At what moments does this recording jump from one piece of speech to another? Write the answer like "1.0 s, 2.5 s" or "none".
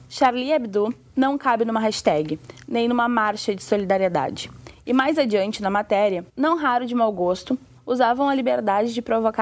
6.3 s, 7.8 s